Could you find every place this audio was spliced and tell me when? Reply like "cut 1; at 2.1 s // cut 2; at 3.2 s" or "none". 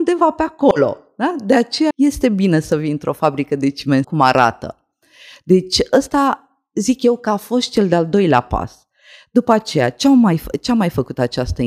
cut 1; at 1.9 s // cut 2; at 4.0 s